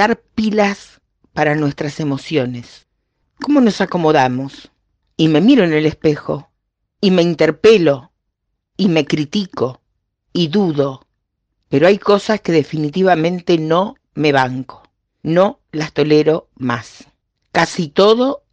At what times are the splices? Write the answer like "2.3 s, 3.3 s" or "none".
none